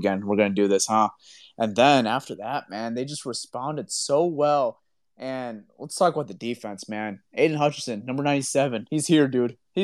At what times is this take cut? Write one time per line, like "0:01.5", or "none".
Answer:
none